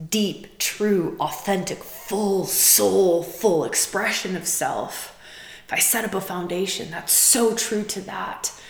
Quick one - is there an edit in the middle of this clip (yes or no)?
no